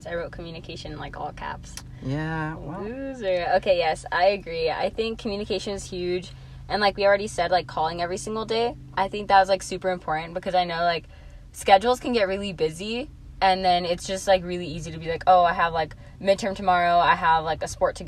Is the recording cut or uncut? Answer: uncut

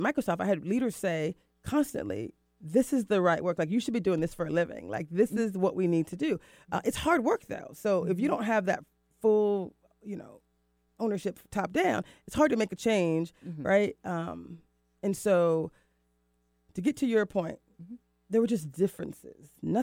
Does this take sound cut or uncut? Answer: uncut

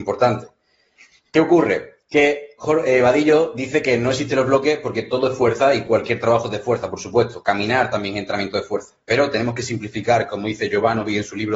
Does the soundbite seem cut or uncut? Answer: uncut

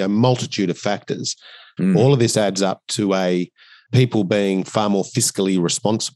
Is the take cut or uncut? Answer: cut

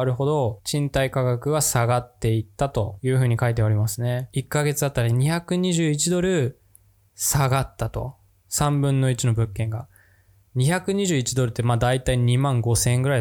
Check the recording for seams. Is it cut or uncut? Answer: cut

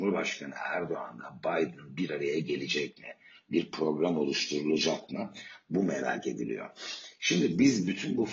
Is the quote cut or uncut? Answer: uncut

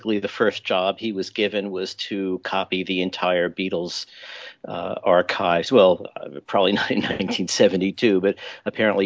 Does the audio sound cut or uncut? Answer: uncut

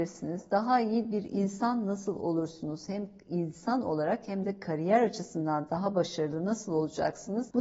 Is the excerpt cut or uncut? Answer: uncut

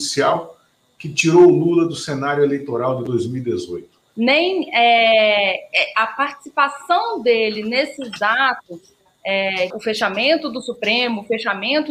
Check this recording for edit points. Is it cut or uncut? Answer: cut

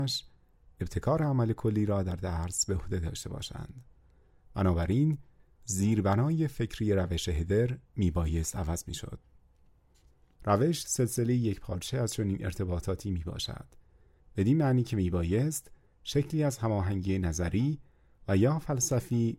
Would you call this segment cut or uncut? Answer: cut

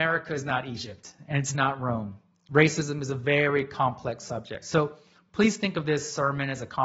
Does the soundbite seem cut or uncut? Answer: cut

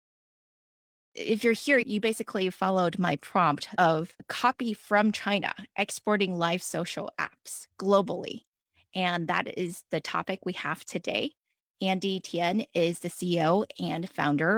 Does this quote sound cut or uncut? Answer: uncut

